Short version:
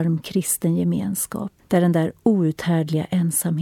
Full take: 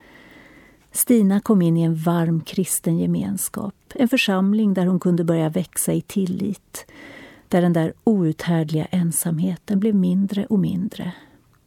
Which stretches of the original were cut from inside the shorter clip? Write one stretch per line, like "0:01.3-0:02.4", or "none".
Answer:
0:03.8-0:07.4